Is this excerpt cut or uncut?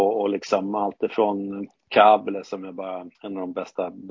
cut